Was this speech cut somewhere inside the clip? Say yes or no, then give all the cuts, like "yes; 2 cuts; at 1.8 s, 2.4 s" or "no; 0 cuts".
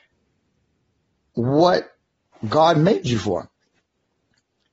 no; 0 cuts